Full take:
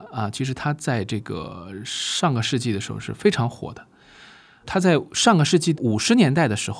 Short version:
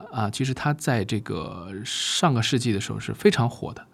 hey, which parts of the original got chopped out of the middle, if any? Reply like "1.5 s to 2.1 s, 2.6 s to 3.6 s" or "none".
none